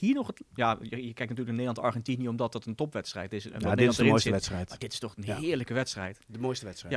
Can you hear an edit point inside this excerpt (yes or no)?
no